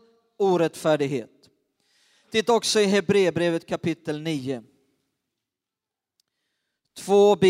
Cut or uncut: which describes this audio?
uncut